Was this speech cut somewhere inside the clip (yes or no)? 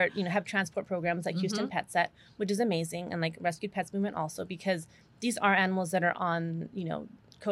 no